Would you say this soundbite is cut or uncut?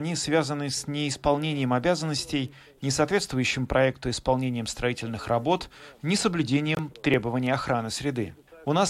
cut